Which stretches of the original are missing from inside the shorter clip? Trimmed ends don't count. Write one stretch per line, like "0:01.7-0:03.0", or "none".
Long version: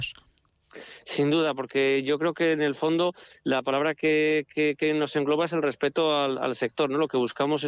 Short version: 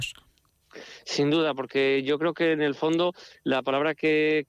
none